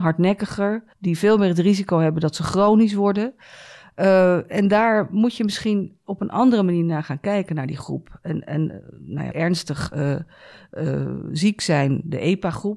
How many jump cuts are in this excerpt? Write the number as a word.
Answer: two